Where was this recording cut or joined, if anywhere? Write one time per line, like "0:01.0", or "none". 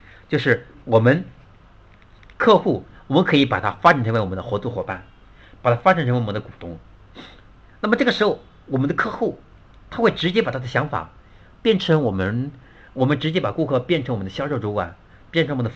none